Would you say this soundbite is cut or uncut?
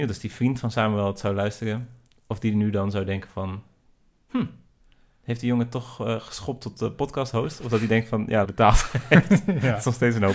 cut